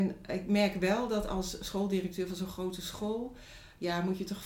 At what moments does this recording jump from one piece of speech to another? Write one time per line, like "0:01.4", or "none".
none

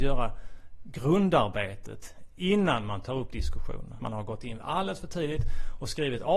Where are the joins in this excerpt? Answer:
0:04.0

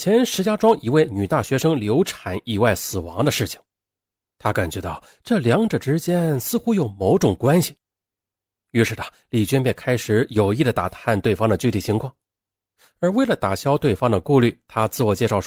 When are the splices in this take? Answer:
none

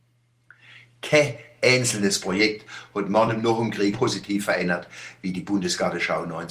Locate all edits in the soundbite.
0:03.9

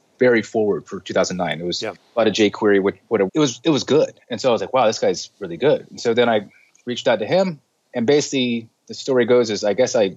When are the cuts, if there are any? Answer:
0:03.3

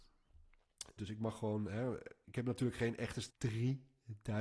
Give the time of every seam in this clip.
0:01.0
0:02.2
0:03.3

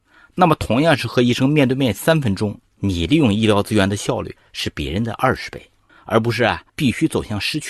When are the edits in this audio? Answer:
0:05.9

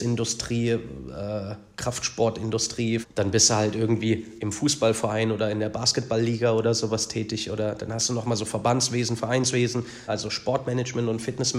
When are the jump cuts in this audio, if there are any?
0:03.0
0:10.1

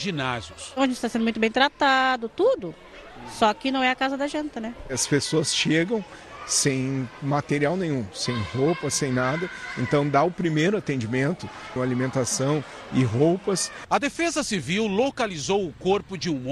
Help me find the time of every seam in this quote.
0:11.8

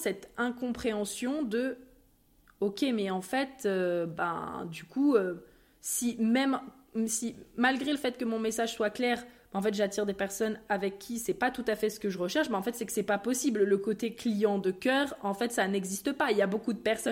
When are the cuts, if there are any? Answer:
none

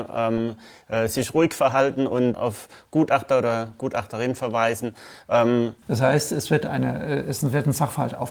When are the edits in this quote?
0:02.3
0:05.8

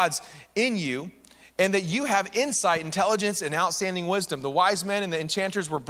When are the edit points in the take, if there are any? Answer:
none

